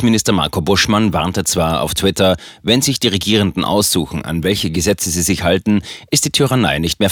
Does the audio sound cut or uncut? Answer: uncut